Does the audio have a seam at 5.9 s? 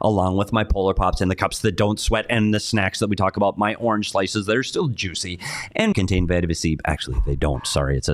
yes; 1 cut; at 5.9 s

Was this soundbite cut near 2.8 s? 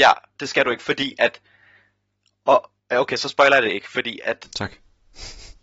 yes; 1 cut; at 2.8 s

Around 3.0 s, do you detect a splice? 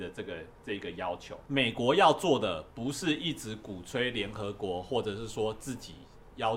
no; 1 cut; at 1.4 s

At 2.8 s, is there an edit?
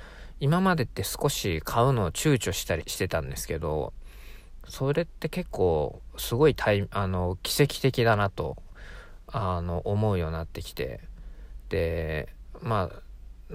yes; 1 cut; at 2.8 s

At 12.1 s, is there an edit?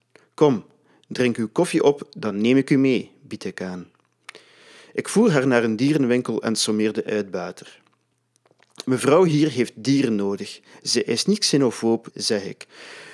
yes; 1 cut; at 12.1 s

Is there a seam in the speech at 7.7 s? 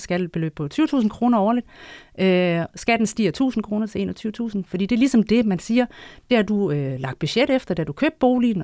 no; 1 cut; at 4.7 s

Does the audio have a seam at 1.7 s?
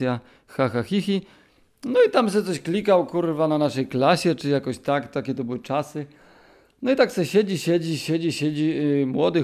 no; 0 cuts

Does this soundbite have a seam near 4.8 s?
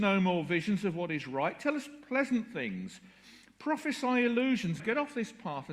yes; 1 cut; at 4.8 s

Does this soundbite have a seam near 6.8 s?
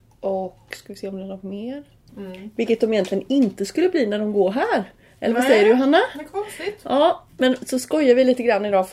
no; 1 cut; at 2.1 s

